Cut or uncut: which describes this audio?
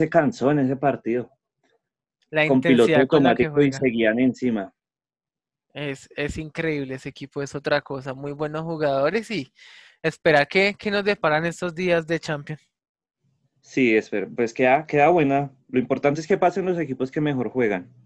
uncut